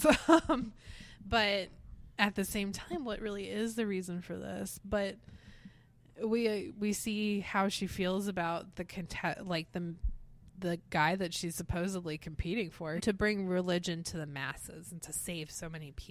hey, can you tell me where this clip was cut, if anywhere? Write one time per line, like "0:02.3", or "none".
0:13.0